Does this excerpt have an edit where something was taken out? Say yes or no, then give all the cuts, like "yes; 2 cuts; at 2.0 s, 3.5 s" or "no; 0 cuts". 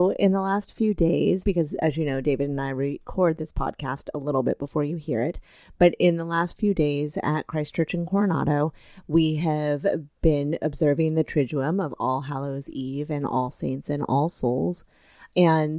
no; 0 cuts